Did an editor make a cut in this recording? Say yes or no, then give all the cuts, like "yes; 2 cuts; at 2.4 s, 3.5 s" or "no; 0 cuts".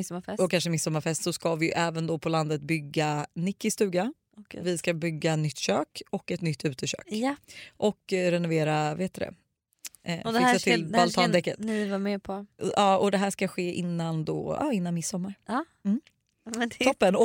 no; 0 cuts